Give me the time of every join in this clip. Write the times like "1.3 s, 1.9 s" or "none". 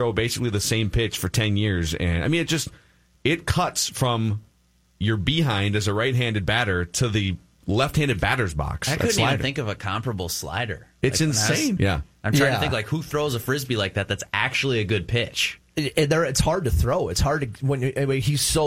11.8 s